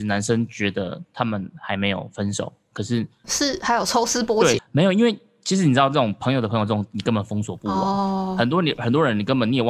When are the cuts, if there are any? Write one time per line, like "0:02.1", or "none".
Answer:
0:03.2
0:04.6

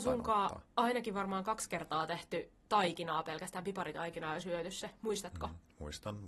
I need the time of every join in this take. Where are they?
none

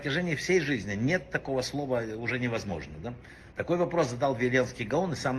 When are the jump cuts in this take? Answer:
0:03.5

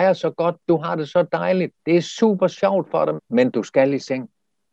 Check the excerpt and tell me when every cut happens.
0:01.8
0:03.2

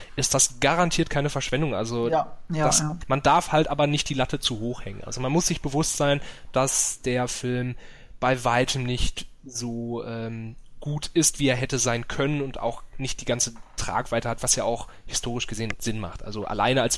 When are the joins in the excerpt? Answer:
0:03.0

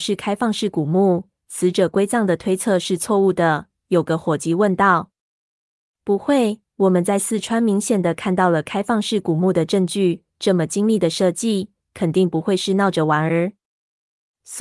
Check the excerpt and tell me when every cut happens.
none

